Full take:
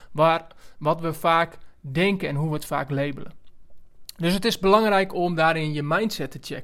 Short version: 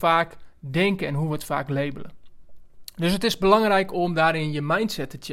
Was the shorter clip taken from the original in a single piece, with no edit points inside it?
yes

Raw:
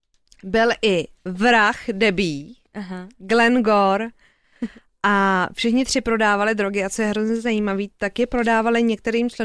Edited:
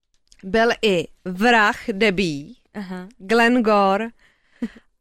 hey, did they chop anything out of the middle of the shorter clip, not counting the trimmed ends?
no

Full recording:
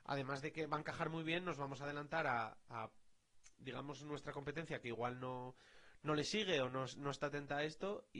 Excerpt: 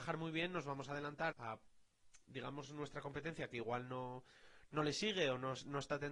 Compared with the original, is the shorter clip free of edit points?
no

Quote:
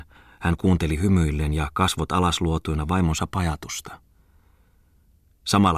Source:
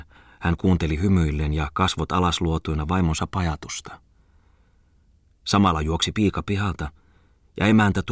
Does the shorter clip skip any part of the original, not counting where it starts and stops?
no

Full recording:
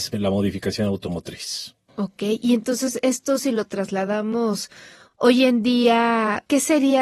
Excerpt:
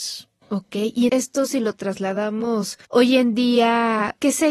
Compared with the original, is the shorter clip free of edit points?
no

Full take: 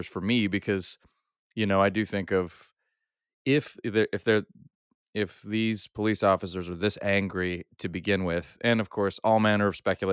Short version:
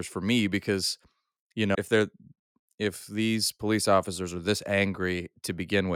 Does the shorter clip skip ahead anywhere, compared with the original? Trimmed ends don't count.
yes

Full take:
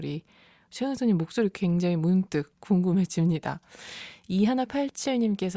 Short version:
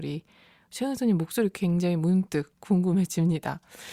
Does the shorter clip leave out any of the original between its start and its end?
no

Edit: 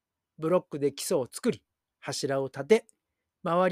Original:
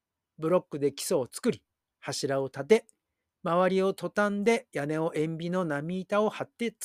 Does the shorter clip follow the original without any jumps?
yes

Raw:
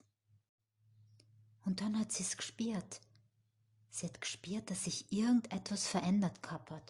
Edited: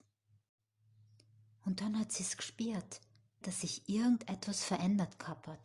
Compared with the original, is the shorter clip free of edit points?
no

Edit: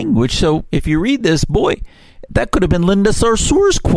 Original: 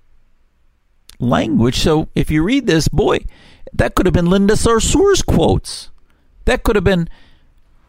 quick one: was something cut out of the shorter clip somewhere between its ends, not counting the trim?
no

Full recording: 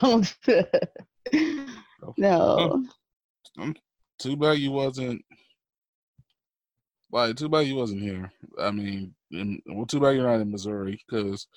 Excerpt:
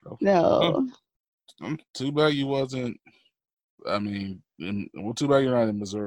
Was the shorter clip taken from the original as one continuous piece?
no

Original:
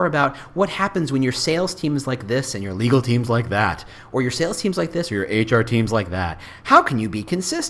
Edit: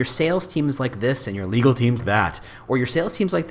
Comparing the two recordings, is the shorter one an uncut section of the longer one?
no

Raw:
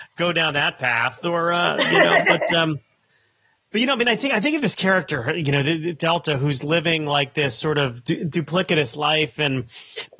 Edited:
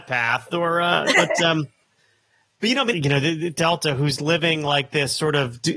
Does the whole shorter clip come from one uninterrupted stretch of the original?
no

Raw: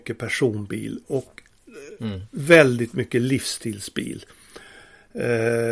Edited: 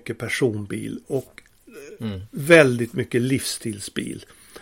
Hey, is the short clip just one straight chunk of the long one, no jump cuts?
yes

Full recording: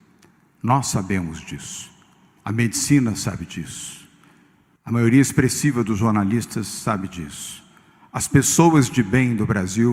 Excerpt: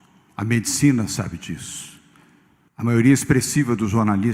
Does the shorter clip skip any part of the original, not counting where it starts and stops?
no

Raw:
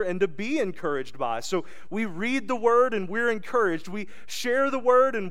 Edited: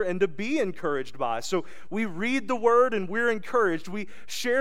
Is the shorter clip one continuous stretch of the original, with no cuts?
yes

